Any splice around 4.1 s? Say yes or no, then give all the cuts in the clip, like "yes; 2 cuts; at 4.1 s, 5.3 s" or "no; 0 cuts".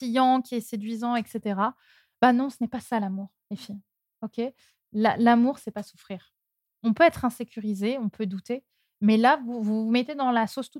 no; 0 cuts